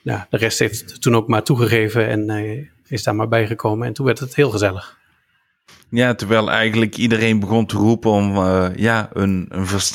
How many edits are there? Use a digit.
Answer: 0